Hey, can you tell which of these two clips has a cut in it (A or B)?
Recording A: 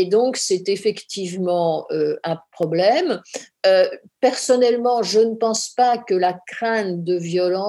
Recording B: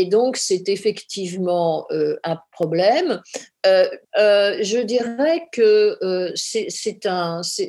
B